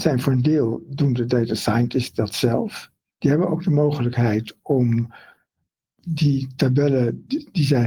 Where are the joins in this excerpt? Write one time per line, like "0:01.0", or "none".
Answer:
none

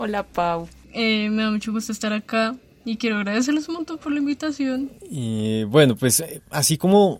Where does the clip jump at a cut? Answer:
none

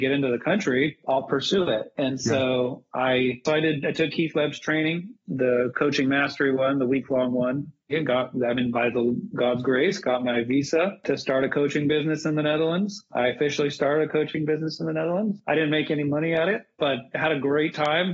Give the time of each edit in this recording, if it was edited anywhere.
none

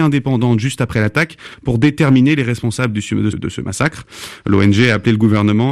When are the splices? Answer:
0:03.3

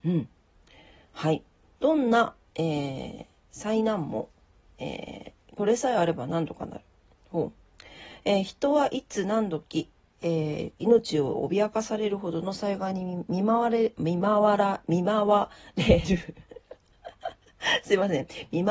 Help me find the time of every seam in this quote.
none

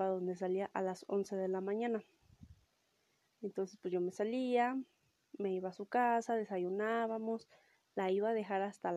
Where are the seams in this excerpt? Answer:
0:03.2

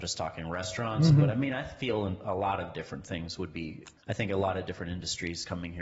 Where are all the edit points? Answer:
0:04.0

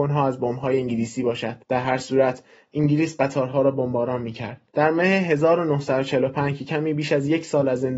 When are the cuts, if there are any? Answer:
0:01.6
0:04.7

